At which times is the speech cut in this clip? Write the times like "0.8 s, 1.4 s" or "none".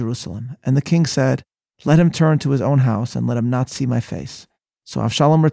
none